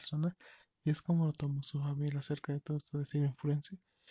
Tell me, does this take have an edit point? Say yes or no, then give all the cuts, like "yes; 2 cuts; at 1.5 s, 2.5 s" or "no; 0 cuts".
no; 0 cuts